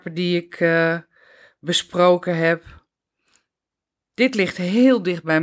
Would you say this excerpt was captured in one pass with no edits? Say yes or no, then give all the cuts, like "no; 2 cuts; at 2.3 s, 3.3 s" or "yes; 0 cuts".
yes; 0 cuts